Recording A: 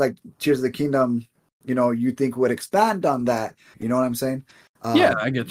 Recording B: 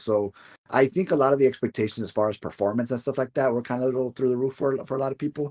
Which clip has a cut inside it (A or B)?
A